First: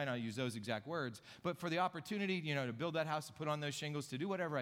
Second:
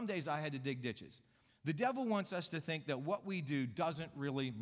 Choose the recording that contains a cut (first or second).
second